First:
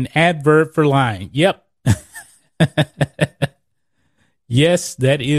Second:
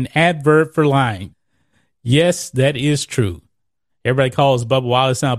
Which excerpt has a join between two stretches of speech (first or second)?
second